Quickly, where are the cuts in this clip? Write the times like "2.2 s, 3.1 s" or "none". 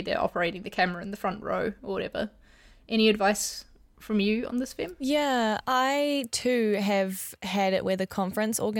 none